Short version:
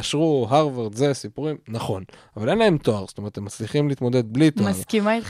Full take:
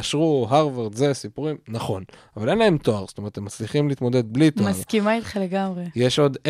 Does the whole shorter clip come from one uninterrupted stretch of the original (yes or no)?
yes